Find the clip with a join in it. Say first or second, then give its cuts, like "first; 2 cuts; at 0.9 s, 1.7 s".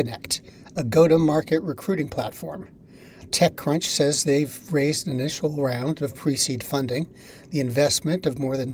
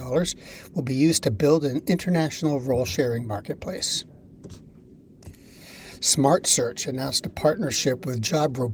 first; 1 cut; at 3.3 s